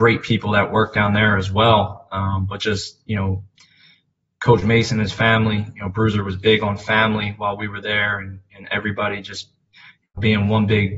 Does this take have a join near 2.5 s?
no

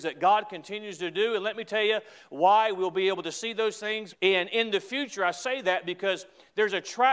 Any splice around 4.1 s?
yes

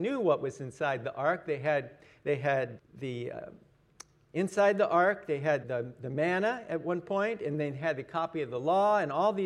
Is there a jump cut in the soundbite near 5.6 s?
yes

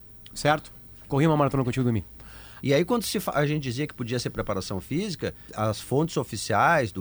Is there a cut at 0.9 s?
no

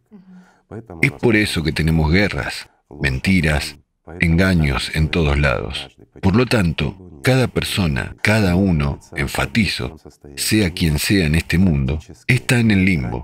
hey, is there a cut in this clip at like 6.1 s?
no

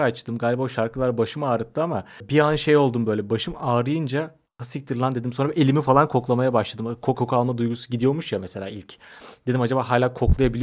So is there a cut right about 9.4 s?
no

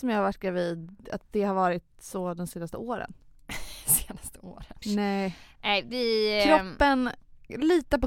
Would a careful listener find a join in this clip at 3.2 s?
no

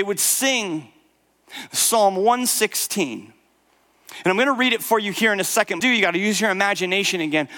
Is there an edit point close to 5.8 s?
yes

